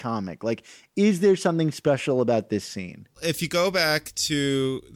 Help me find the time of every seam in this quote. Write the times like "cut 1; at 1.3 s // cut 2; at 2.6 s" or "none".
none